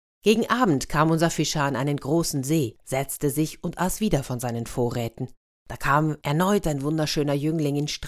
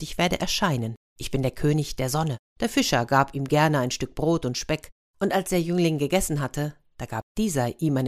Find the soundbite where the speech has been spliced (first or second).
second